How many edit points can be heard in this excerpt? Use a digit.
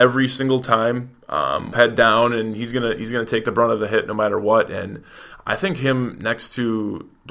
1